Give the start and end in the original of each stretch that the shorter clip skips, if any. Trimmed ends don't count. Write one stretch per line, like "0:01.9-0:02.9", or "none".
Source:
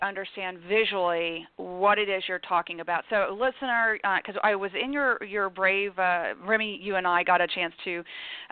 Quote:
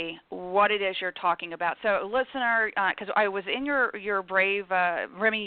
none